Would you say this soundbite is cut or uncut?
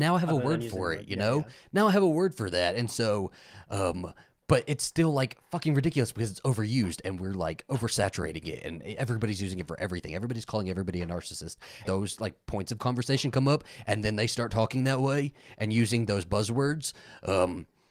cut